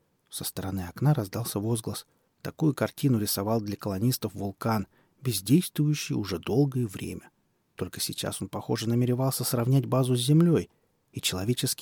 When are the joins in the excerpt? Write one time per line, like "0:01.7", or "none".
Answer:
0:02.3